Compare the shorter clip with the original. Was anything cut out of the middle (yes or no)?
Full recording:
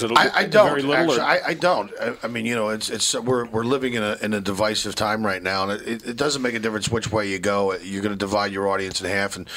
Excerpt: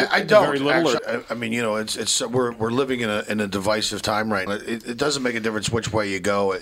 yes